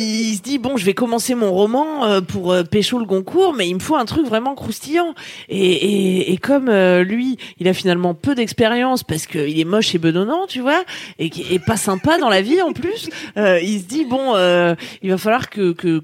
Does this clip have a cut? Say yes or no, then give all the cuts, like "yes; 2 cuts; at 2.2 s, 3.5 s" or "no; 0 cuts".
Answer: no; 0 cuts